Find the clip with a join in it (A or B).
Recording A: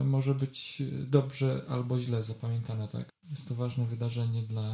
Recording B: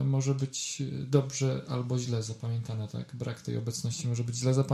A